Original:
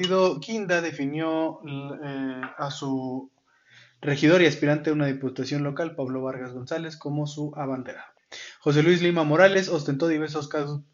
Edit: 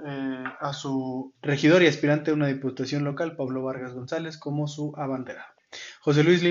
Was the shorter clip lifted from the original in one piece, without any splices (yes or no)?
no